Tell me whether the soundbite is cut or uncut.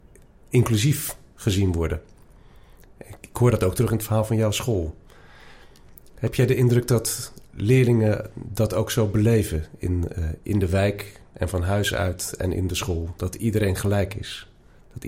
uncut